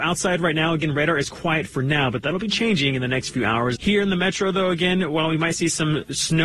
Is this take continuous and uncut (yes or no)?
no